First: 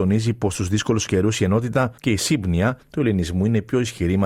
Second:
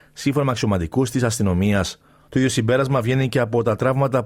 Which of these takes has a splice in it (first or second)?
second